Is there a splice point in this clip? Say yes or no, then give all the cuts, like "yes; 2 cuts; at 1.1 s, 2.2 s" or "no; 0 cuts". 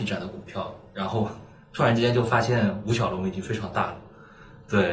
no; 0 cuts